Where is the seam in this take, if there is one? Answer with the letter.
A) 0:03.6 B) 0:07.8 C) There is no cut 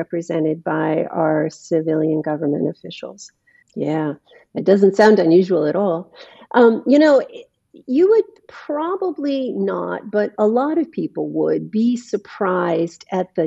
A